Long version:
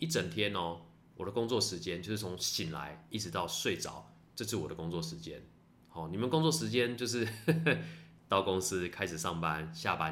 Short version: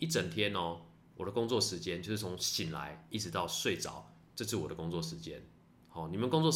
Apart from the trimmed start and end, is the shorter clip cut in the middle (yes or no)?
no